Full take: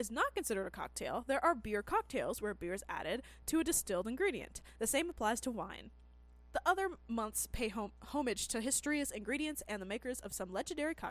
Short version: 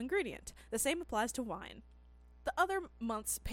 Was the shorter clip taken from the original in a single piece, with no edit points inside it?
yes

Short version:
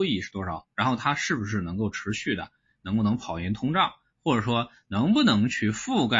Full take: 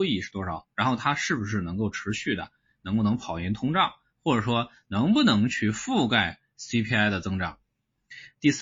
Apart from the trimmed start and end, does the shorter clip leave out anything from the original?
no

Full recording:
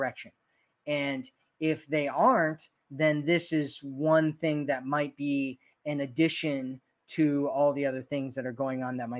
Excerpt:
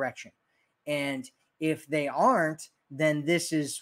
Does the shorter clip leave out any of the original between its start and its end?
no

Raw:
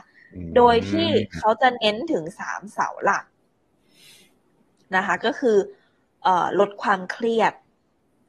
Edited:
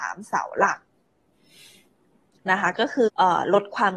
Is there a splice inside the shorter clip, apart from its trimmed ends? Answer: yes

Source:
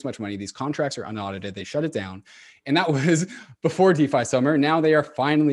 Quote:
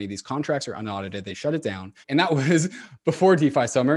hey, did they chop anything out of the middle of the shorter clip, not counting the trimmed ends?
yes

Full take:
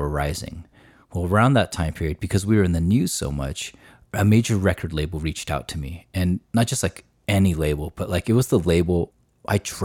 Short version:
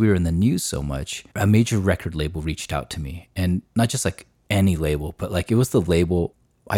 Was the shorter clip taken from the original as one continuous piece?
no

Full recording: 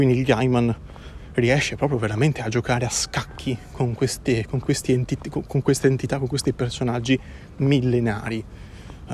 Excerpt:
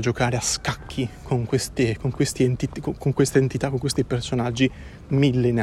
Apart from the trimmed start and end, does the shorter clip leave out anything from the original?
no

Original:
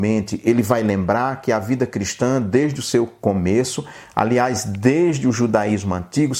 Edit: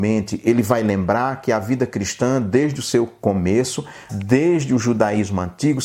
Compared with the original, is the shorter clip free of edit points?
no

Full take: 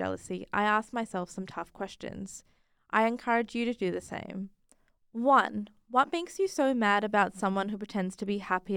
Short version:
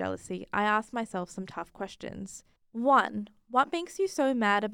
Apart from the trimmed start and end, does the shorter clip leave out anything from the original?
yes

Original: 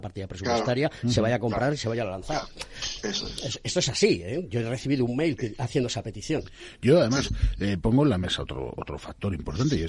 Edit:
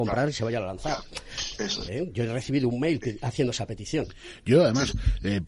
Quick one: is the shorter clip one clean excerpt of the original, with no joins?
no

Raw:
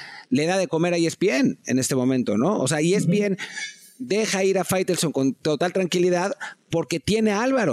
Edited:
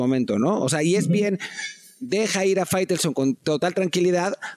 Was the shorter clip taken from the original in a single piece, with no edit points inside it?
yes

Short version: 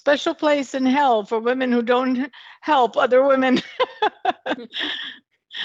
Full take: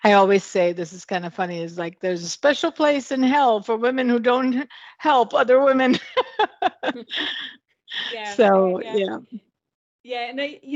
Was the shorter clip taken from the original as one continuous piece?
yes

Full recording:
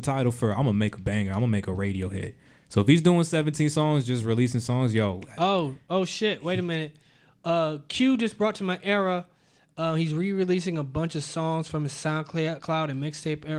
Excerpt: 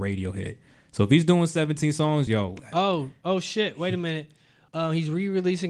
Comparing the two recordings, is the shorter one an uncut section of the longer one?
no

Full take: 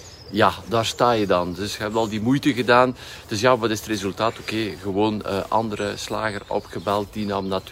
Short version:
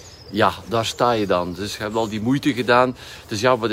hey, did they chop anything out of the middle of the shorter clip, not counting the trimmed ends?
no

